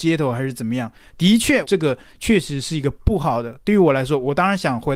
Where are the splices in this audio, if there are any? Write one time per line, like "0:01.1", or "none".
0:01.6